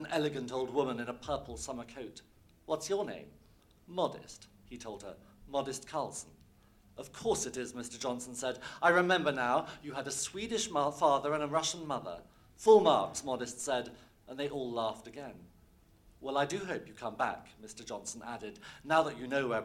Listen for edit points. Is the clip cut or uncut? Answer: uncut